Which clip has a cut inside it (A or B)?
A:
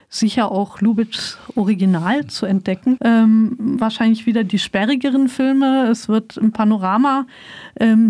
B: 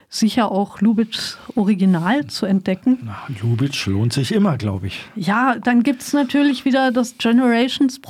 A